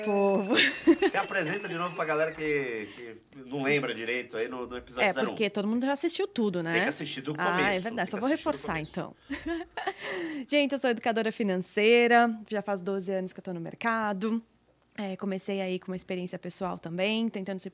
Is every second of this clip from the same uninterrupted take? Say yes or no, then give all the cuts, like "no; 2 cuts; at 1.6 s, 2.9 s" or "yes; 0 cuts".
yes; 0 cuts